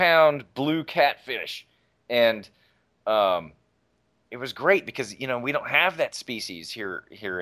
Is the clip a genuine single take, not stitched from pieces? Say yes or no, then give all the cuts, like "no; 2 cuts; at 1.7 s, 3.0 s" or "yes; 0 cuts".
yes; 0 cuts